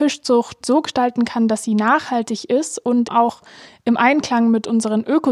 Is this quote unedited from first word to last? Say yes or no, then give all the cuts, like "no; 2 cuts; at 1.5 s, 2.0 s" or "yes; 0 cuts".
no; 1 cut; at 3.1 s